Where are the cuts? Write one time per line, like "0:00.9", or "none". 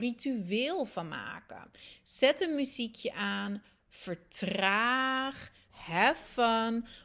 0:05.7